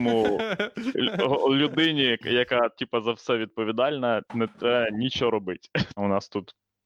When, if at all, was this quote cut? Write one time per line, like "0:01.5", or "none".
0:06.0